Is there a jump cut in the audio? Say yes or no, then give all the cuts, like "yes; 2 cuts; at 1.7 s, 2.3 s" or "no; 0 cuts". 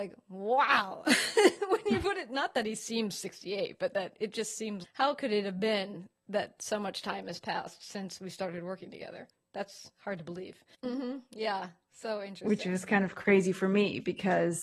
yes; 2 cuts; at 4.8 s, 10.7 s